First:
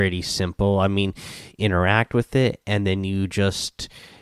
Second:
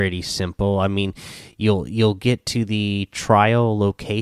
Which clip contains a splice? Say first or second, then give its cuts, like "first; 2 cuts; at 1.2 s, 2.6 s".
first; 1 cut; at 1.5 s